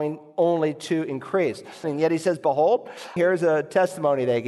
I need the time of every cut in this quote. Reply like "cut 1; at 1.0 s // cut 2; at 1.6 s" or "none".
cut 1; at 1.8 s // cut 2; at 3.2 s